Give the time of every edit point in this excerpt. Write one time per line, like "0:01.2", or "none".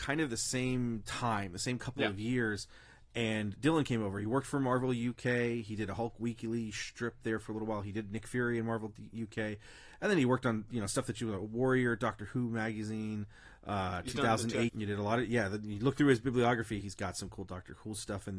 0:14.7
0:16.8